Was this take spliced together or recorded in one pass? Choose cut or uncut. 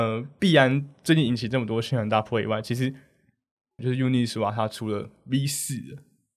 cut